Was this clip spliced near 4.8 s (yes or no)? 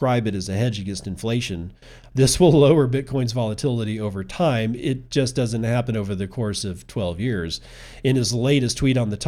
no